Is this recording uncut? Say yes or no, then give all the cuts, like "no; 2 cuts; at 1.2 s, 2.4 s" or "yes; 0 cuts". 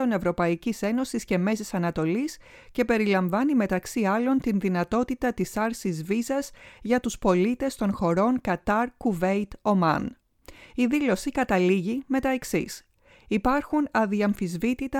yes; 0 cuts